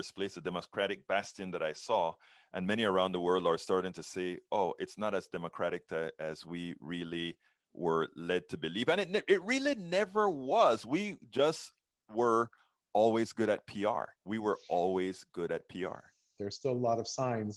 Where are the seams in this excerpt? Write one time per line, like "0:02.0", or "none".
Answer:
0:14.1
0:16.4